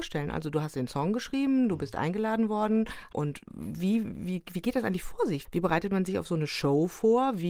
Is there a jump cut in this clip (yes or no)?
no